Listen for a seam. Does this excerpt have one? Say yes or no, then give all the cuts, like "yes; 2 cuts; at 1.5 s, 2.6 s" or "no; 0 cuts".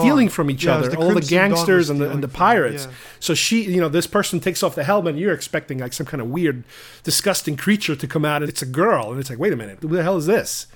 yes; 2 cuts; at 8.4 s, 9.8 s